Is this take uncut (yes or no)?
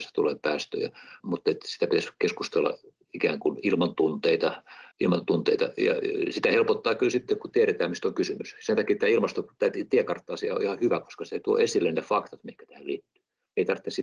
no